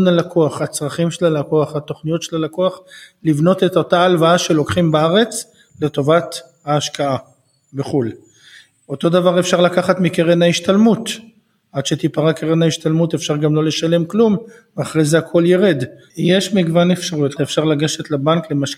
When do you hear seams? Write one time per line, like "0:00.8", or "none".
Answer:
0:16.1
0:17.4